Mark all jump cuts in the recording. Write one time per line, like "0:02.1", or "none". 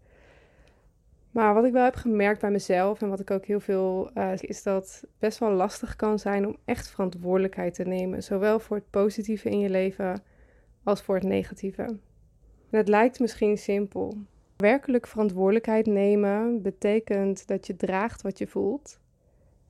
0:04.4